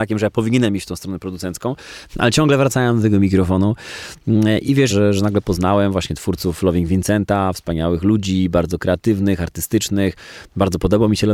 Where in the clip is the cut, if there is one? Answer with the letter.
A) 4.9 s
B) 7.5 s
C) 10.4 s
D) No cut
A